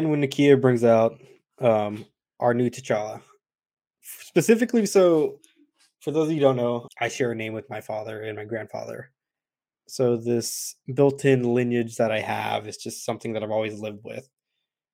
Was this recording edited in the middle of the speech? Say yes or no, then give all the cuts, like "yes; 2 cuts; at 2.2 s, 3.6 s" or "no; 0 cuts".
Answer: yes; 1 cut; at 6.9 s